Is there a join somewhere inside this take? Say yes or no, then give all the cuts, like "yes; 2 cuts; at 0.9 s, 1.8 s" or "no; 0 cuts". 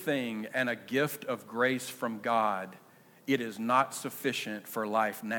no; 0 cuts